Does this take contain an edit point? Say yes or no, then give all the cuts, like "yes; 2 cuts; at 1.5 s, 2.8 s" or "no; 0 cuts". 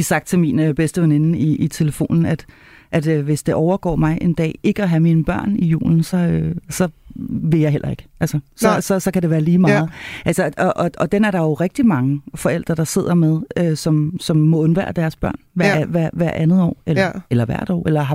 yes; 1 cut; at 1.6 s